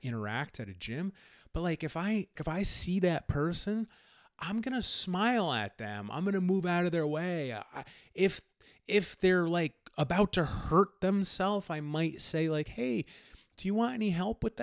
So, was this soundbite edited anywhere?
yes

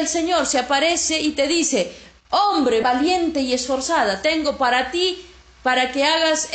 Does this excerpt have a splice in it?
yes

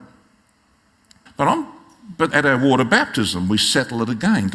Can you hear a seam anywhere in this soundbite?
yes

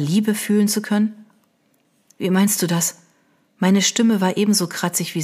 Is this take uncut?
yes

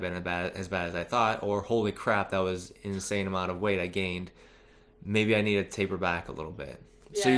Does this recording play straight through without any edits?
yes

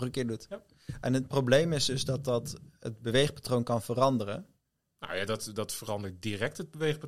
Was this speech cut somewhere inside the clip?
no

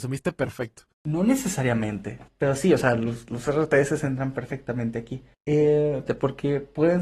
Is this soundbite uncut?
no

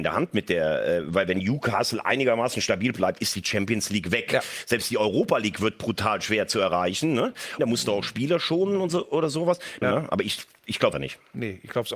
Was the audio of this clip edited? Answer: yes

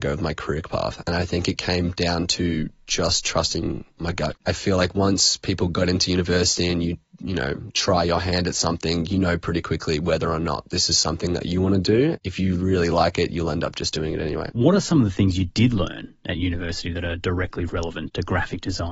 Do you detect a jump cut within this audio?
yes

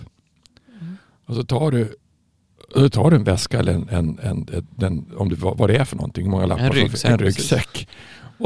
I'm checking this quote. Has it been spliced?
no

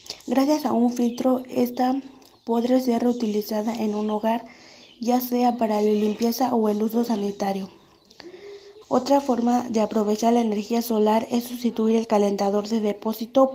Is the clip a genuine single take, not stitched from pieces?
no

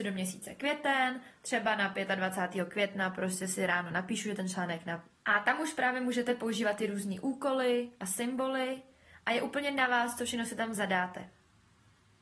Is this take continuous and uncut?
no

